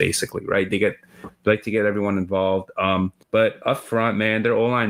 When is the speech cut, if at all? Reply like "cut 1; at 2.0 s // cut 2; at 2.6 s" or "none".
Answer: cut 1; at 3.2 s